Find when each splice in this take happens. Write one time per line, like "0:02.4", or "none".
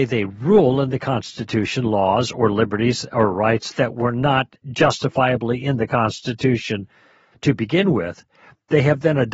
0:04.6